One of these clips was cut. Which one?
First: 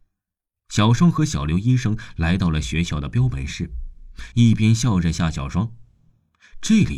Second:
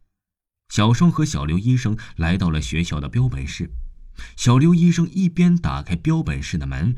first; 1 cut; at 4.3 s

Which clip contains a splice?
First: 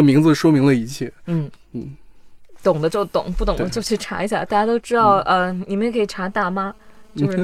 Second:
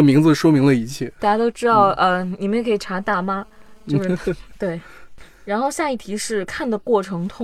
second; 1 cut; at 1.2 s

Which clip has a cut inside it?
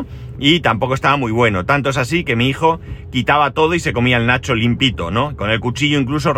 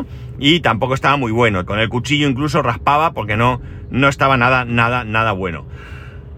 second; 1 cut; at 1.7 s

